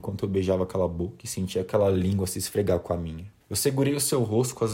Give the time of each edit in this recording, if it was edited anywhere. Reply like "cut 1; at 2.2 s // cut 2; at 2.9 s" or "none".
cut 1; at 3.4 s